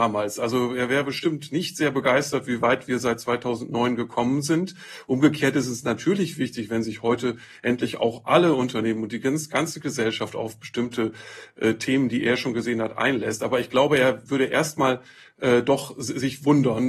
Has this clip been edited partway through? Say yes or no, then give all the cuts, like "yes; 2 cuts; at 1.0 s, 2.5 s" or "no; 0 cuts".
no; 0 cuts